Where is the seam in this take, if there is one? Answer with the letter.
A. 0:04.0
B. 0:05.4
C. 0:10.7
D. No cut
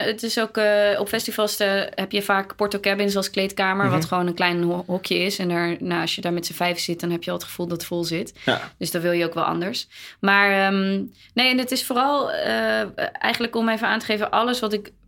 D